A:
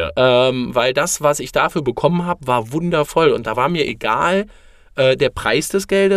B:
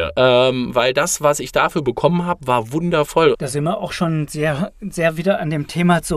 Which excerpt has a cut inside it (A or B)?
B